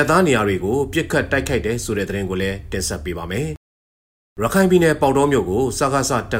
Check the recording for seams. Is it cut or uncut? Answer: uncut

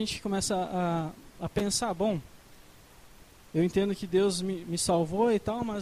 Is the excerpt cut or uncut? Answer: cut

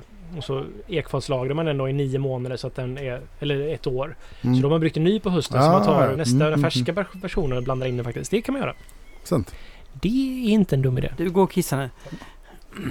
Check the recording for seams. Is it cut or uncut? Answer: cut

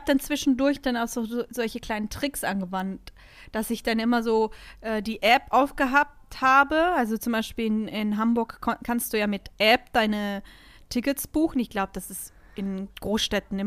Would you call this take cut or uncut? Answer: uncut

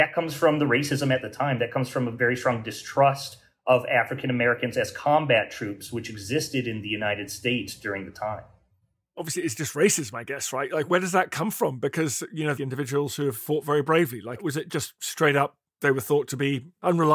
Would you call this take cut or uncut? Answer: cut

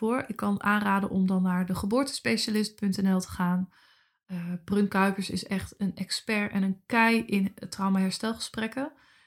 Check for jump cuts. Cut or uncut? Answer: uncut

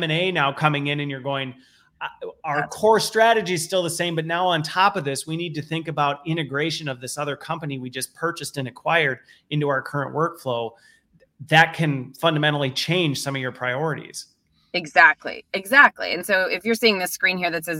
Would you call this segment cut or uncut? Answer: uncut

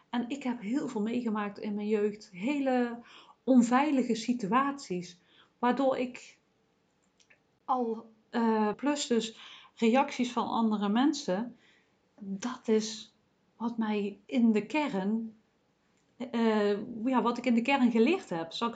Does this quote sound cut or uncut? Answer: cut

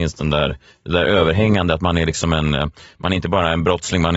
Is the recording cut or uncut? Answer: uncut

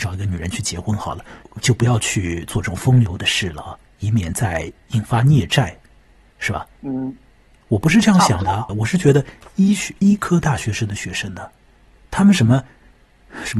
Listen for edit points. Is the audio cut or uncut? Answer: cut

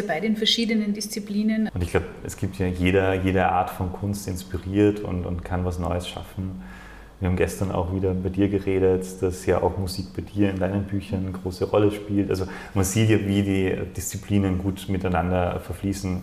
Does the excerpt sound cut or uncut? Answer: cut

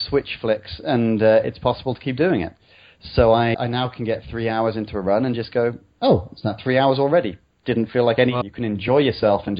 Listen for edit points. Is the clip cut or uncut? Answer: cut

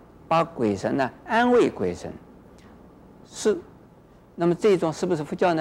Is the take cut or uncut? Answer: cut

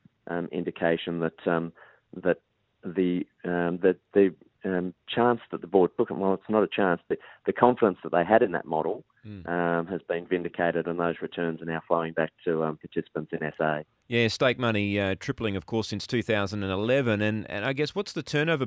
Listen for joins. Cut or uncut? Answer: uncut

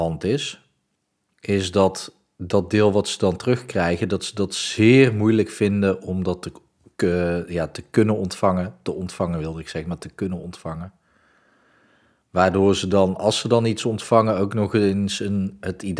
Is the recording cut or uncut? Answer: uncut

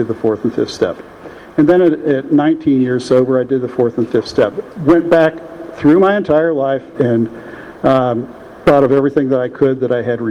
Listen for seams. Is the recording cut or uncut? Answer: cut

